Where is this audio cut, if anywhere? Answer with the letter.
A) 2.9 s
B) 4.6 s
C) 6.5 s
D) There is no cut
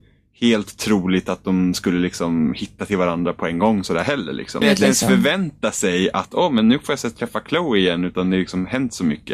B